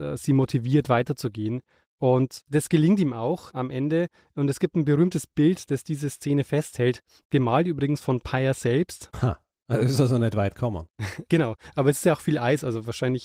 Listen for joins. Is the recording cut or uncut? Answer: cut